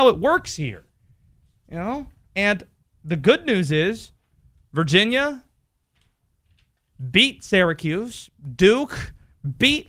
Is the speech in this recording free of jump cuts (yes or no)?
yes